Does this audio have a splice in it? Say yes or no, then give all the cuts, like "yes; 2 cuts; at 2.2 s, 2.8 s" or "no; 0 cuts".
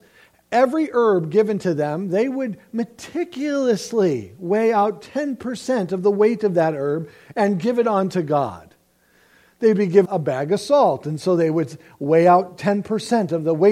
yes; 1 cut; at 10.0 s